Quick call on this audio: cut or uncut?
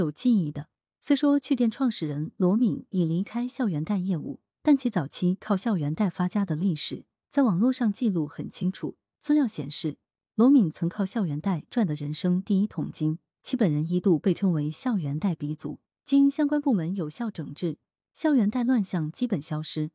uncut